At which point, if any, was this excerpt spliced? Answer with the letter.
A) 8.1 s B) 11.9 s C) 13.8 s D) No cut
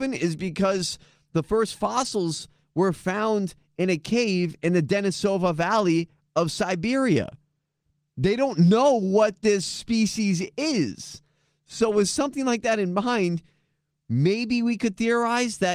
D